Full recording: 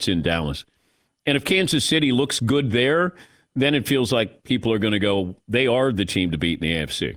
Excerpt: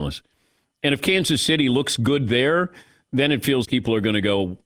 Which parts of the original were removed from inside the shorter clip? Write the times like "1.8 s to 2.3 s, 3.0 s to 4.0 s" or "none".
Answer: 4.1 s to 4.4 s